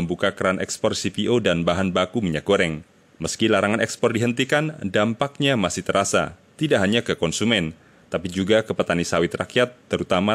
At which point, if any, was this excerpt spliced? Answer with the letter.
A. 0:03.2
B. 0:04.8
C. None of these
C